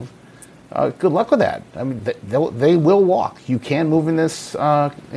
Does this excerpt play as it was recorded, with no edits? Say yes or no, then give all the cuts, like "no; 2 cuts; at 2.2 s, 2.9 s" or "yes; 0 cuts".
no; 1 cut; at 2.0 s